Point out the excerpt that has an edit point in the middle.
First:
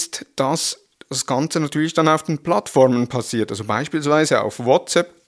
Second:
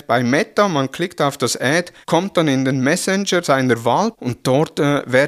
second; 2 cuts; at 2.0 s, 4.1 s

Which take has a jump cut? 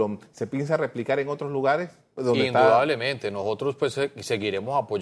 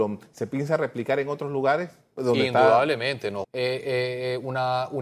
second; 1 cut; at 3.4 s

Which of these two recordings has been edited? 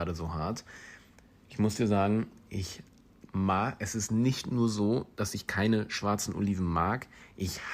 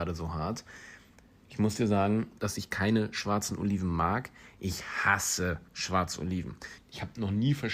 second; 2 cuts; at 2.4 s, 6.8 s

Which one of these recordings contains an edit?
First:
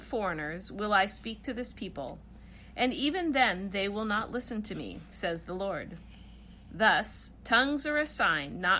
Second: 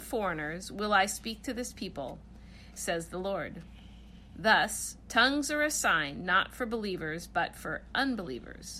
second; 1 cut; at 2.7 s

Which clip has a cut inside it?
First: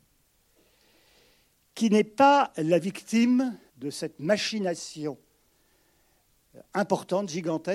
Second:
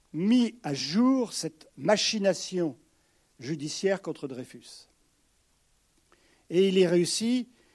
first; 1 cut; at 3.7 s

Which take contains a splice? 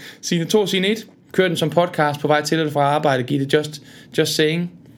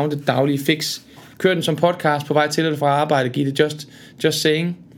first; 1 cut; at 1.3 s

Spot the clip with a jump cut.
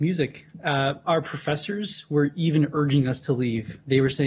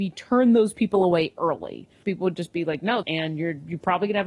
second; 2 cuts; at 2.0 s, 3.0 s

